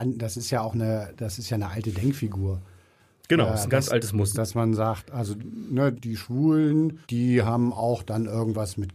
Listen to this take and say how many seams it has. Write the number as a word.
three